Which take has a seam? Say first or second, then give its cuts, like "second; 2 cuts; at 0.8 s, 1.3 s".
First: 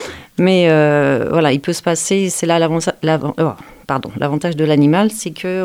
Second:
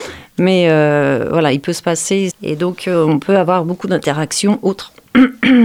second; 1 cut; at 2.3 s